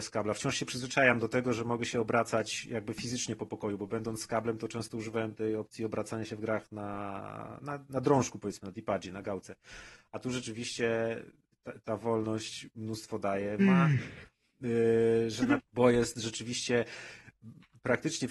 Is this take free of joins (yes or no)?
no